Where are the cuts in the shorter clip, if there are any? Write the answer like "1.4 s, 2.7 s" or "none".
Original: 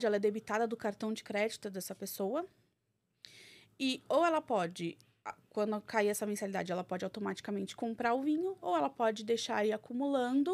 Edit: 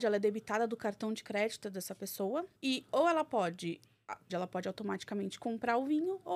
2.6 s, 4.3 s

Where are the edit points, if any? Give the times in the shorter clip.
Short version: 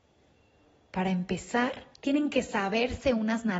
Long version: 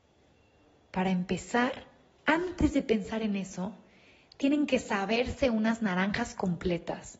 1.9 s

